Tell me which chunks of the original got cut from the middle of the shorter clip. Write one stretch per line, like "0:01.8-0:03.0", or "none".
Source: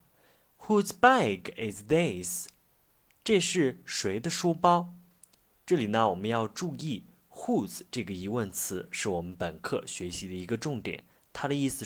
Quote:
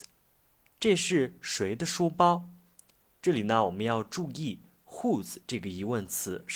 none